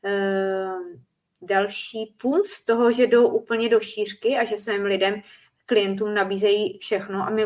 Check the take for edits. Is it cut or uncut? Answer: uncut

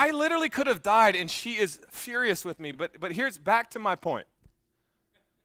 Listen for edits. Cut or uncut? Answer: uncut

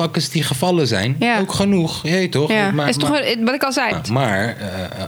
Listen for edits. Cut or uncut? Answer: cut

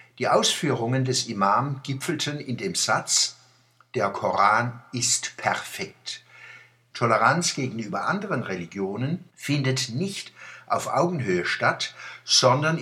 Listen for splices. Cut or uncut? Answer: cut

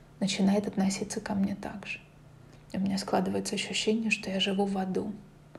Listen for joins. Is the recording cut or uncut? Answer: uncut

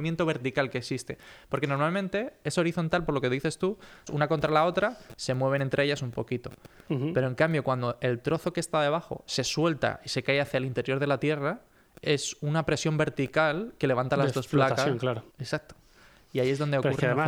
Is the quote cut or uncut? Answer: cut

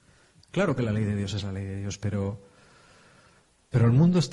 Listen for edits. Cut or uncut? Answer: uncut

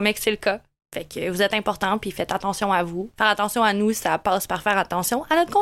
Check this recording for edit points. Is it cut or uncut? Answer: uncut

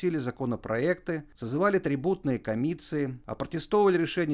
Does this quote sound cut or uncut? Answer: uncut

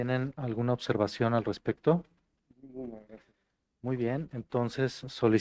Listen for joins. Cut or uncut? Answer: uncut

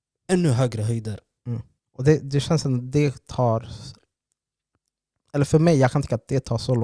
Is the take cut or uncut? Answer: cut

